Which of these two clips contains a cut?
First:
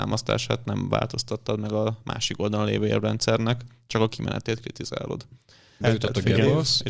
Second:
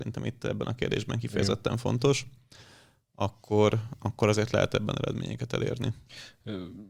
first; 1 cut; at 5.8 s

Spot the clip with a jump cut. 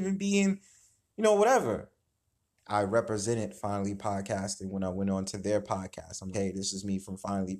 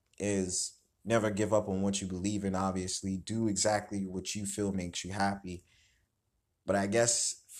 first; 2 cuts; at 2.6 s, 6.3 s

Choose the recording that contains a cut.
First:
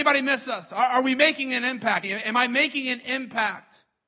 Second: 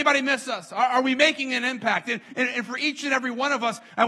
first; 1 cut; at 2.0 s

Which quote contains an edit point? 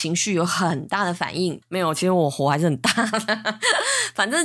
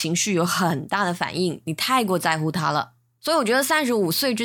first; 1 cut; at 1.6 s

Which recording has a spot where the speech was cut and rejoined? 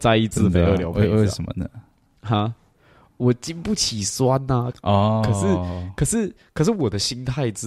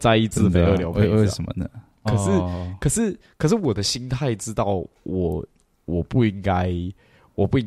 second; 1 cut; at 2.1 s

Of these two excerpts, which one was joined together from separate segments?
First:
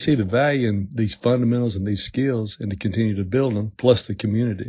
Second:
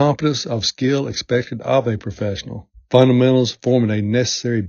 second; 1 cut; at 2.9 s

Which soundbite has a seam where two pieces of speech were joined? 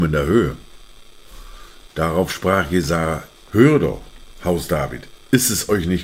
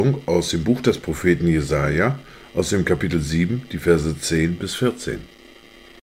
first; 2 cuts; at 1.9 s, 3.3 s

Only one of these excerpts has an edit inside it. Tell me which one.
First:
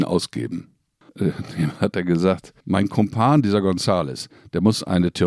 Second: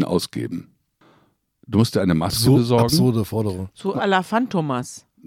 first; 2 cuts; at 1.1 s, 2.6 s

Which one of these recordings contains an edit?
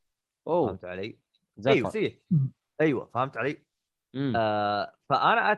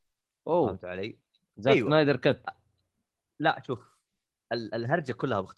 first; 1 cut; at 1.8 s

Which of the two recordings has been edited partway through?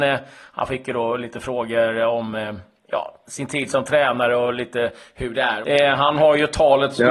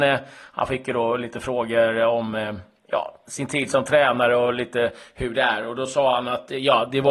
first; 1 cut; at 5.6 s

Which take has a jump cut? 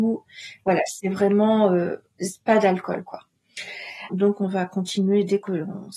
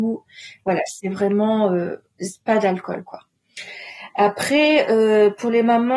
first; 1 cut; at 4.1 s

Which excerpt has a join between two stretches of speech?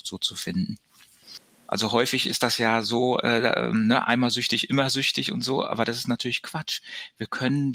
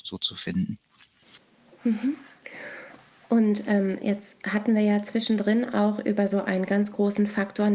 first; 1 cut; at 1.7 s

